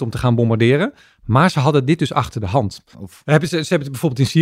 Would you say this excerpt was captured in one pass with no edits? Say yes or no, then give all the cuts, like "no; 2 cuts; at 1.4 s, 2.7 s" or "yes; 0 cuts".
no; 1 cut; at 2.9 s